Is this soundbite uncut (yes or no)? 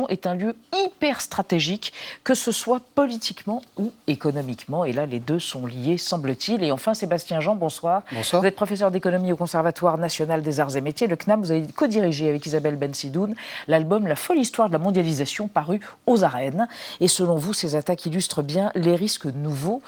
yes